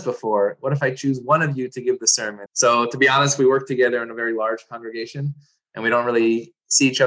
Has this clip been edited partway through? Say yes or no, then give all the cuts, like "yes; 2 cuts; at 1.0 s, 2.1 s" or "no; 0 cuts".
yes; 1 cut; at 2.5 s